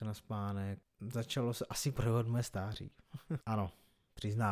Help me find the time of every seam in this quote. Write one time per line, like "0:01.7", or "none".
0:03.4